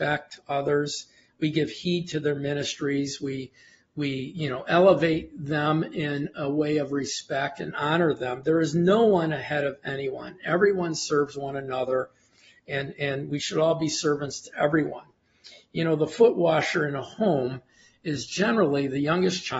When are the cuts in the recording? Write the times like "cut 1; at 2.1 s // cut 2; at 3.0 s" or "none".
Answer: none